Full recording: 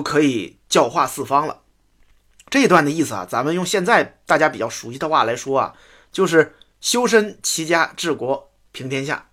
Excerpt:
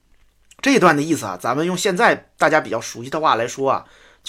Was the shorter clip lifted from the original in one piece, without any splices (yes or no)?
yes